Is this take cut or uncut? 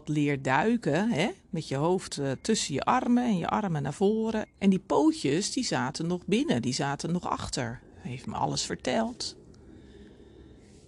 cut